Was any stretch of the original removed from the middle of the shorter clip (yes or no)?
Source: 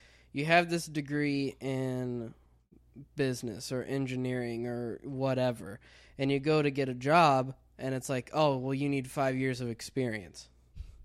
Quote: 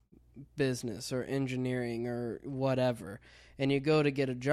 no